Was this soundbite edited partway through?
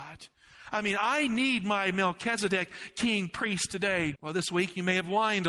yes; 1 cut; at 4.1 s

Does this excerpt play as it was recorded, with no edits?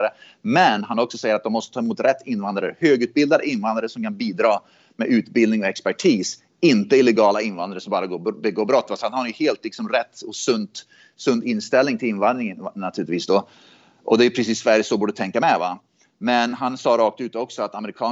yes; 0 cuts

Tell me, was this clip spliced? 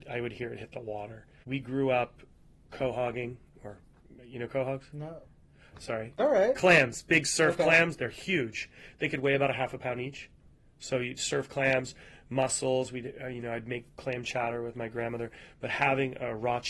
no; 0 cuts

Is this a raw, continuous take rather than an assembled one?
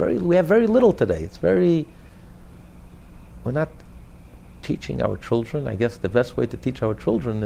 yes; 0 cuts

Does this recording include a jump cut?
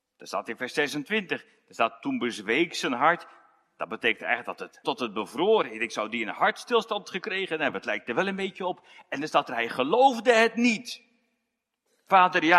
yes; 1 cut; at 4.8 s

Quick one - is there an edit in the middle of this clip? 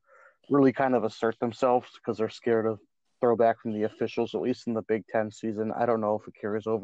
no; 0 cuts

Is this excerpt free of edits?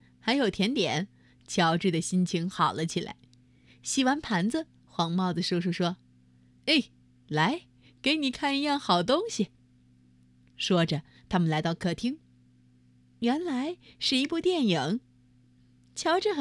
yes; 0 cuts

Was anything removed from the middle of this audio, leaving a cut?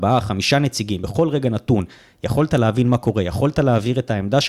no; 0 cuts

